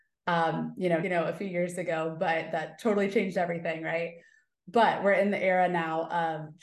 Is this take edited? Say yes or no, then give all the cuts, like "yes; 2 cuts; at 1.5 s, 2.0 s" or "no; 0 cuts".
yes; 1 cut; at 1.0 s